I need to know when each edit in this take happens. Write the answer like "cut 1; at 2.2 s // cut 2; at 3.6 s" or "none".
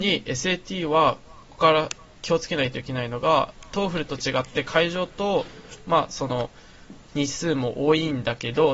cut 1; at 1.5 s